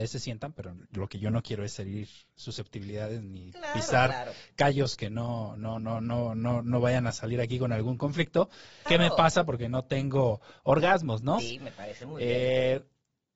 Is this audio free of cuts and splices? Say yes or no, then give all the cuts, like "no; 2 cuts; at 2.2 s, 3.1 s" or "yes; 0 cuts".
no; 2 cuts; at 8.9 s, 11.4 s